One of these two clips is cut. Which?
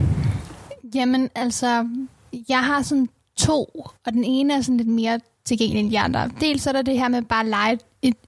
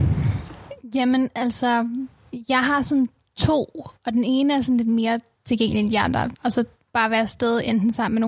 second; 1 cut; at 6.3 s

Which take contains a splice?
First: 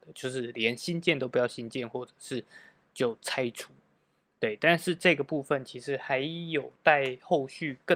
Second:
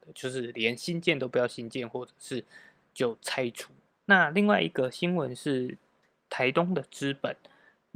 second; 1 cut; at 3.9 s

